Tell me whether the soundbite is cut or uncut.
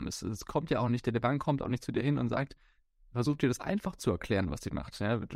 uncut